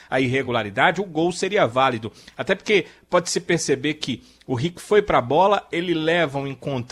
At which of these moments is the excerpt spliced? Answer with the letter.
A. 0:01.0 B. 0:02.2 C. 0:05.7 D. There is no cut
D